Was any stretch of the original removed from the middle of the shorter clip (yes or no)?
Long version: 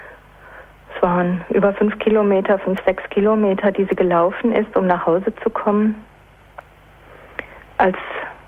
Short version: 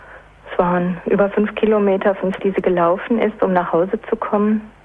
yes